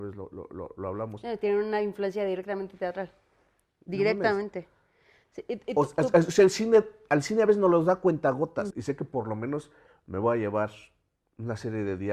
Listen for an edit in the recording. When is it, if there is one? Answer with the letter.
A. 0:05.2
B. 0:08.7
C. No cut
B